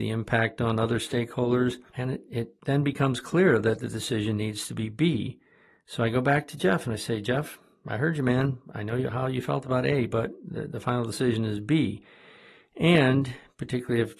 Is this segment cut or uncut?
uncut